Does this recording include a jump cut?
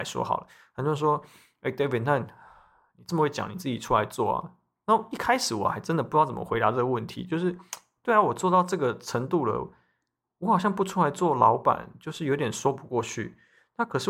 no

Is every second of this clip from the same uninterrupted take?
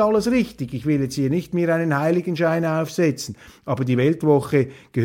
yes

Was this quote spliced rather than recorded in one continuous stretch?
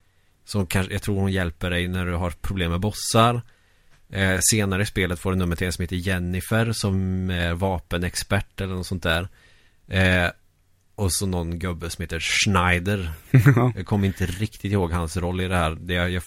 no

